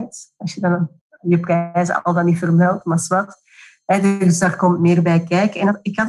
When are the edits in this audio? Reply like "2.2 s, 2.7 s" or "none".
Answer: none